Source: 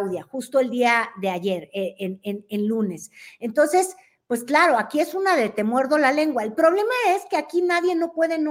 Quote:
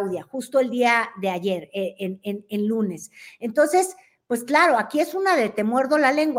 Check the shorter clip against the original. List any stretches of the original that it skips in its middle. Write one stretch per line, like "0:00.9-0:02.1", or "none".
none